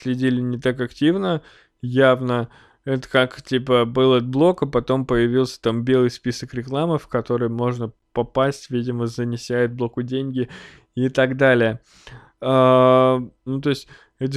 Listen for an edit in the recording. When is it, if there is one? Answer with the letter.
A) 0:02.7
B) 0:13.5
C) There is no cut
B